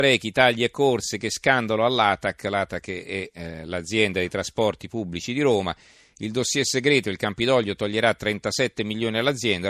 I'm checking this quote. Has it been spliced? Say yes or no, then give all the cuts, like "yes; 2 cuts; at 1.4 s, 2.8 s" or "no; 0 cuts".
no; 0 cuts